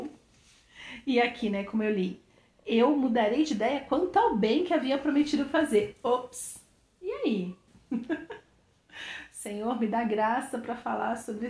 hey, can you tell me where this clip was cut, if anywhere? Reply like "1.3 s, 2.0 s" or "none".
7.7 s